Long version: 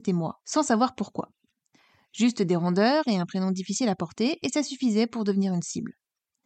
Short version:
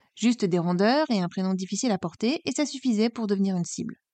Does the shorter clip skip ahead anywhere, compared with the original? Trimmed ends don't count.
no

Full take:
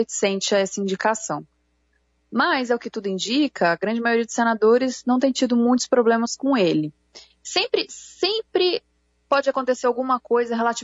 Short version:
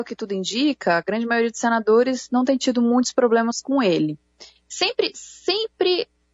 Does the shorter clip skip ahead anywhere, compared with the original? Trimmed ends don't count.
no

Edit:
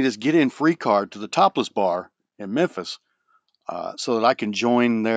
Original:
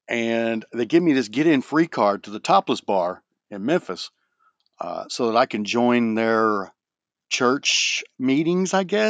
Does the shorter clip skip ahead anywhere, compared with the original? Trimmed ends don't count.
no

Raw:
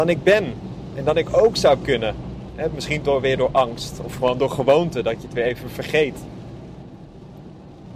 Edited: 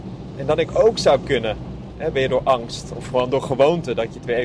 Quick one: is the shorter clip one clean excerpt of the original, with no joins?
no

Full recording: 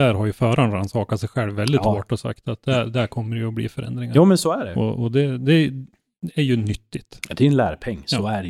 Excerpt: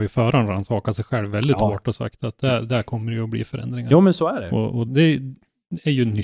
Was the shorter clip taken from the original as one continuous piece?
no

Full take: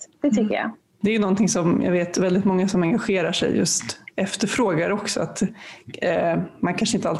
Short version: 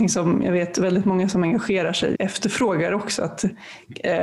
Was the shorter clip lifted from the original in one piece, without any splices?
no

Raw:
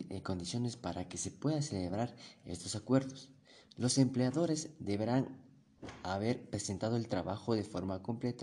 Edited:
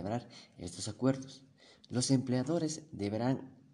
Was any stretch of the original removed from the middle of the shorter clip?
no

